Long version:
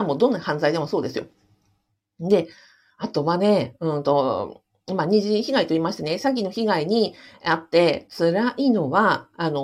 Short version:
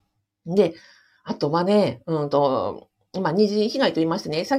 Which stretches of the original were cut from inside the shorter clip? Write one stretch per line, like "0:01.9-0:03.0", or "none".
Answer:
none